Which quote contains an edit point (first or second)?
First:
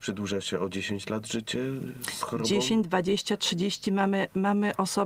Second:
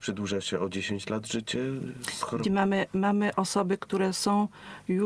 second